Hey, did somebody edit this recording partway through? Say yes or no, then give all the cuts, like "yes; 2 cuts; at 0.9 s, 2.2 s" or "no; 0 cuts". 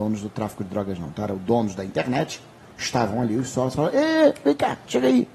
no; 0 cuts